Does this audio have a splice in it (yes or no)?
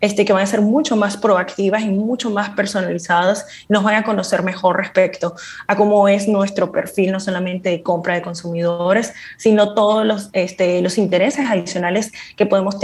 no